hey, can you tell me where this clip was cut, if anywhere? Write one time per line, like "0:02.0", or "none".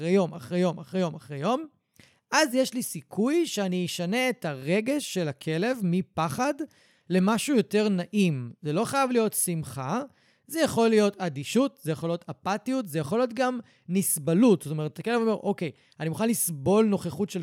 none

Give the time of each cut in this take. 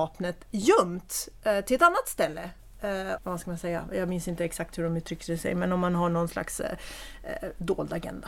0:03.2

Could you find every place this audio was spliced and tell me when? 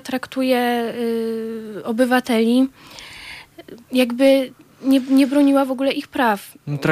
0:03.8

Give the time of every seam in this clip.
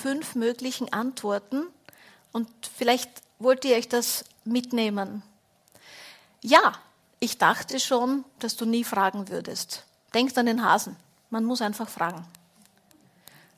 none

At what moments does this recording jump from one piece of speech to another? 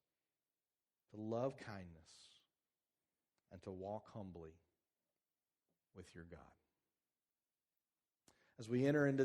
none

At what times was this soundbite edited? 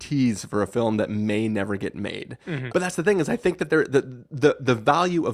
0:02.7

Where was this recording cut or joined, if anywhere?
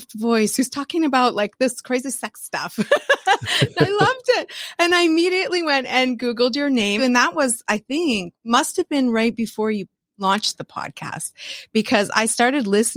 0:07.0

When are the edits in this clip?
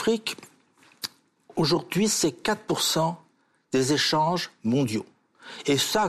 none

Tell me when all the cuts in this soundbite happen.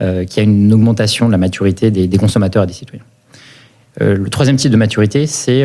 none

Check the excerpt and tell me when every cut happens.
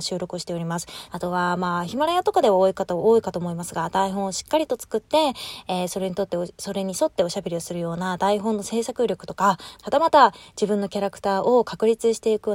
0:01.1
0:09.8

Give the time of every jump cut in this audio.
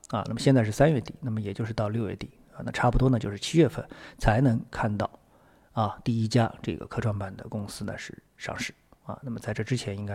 none

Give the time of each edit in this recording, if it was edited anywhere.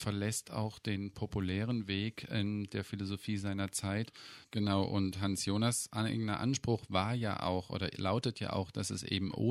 0:04.4

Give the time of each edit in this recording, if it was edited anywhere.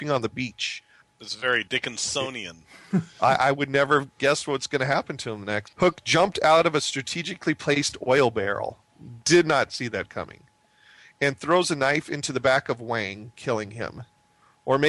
0:05.6

